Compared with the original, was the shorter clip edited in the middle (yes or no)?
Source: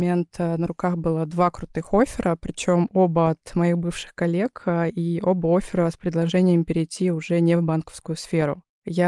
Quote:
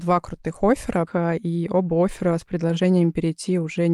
yes